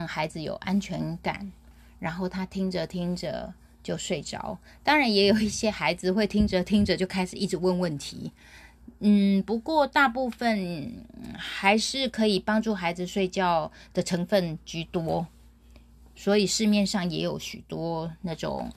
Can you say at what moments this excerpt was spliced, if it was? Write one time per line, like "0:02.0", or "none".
none